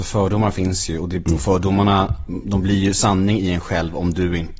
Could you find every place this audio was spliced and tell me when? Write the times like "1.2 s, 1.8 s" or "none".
none